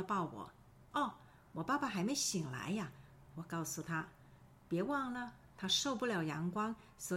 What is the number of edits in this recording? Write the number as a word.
one